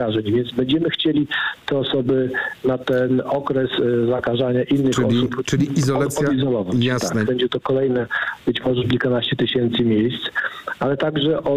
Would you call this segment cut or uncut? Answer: cut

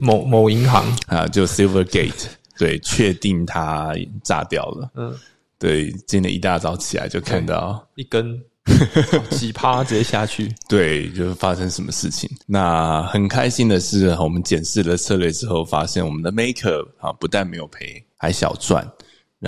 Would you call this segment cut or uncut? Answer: cut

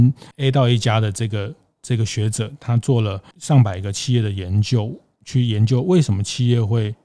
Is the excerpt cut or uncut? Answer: uncut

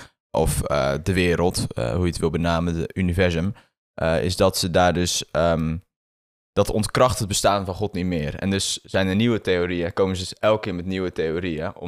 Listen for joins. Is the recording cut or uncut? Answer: uncut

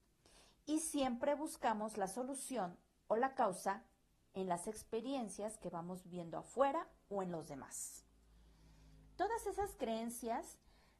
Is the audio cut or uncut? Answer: uncut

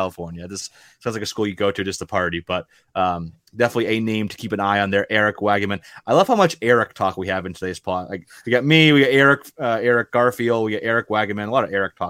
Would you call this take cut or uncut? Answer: uncut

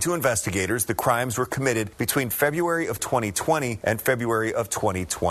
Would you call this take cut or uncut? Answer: uncut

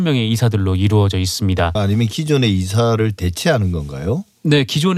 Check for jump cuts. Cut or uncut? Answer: cut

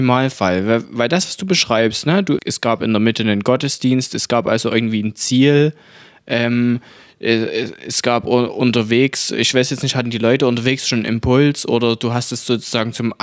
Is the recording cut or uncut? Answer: cut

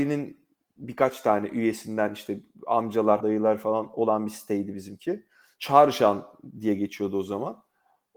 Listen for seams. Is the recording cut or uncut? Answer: cut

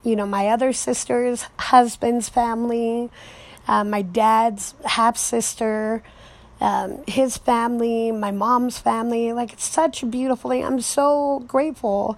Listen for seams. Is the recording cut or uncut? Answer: uncut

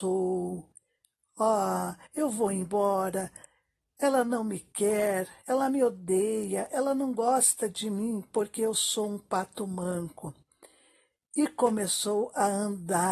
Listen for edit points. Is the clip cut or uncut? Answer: uncut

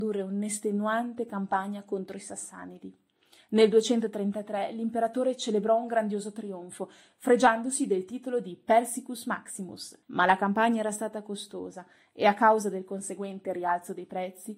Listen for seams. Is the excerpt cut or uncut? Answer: cut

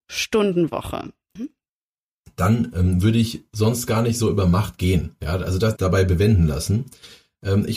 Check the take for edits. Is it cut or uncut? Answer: cut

